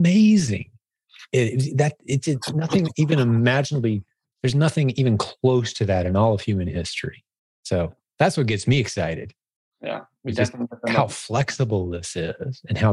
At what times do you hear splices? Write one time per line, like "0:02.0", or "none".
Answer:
none